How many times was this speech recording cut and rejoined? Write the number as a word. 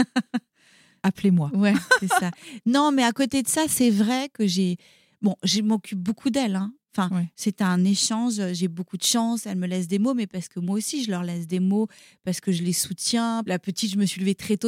one